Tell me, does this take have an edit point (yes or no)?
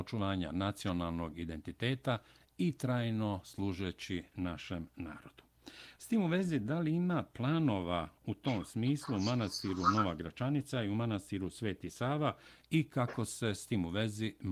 no